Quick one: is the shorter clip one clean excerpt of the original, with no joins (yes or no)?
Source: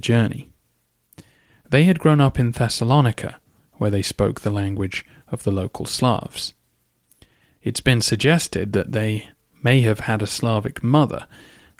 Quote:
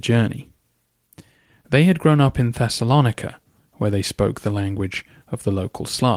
yes